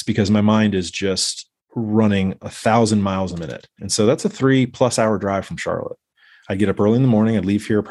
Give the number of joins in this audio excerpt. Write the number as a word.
one